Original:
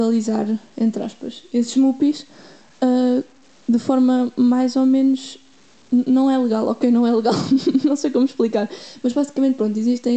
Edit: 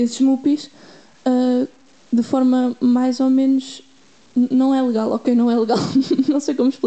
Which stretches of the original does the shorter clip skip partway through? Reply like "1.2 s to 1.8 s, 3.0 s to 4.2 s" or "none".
none

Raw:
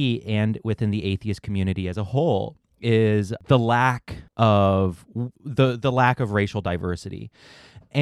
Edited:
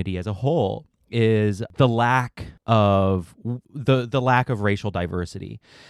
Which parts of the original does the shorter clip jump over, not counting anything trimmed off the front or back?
none

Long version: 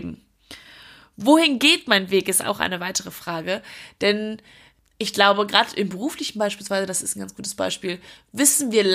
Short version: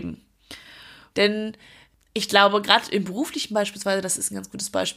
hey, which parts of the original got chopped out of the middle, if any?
1.1 s to 4.0 s

